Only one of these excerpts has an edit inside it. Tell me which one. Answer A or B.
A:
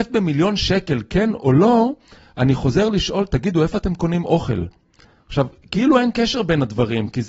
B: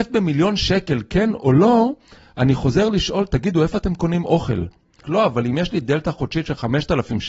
B